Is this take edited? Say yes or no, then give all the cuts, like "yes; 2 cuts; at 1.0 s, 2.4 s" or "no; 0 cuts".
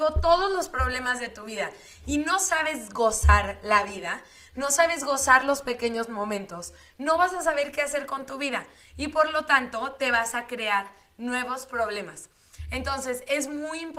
no; 0 cuts